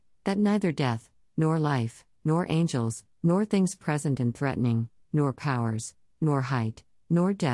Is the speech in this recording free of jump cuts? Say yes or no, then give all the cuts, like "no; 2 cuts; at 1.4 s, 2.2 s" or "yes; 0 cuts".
no; 2 cuts; at 3.2 s, 5.0 s